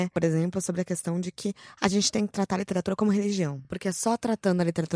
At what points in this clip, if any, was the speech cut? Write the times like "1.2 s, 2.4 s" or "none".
none